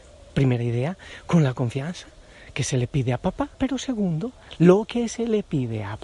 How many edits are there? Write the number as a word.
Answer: one